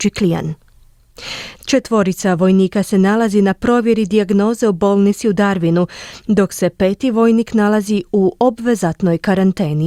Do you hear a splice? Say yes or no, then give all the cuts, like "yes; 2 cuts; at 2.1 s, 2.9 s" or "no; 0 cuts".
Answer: yes; 1 cut; at 1.5 s